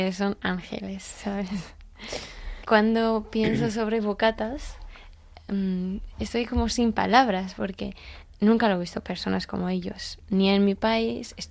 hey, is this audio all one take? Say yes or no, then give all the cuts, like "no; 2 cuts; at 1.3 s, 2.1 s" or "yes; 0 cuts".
no; 1 cut; at 2.6 s